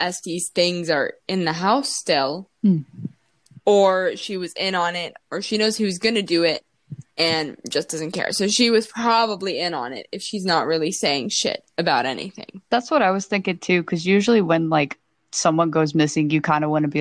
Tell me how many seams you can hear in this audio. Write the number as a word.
one